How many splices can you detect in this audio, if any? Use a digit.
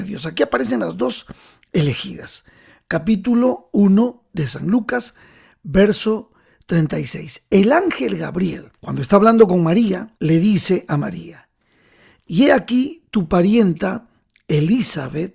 2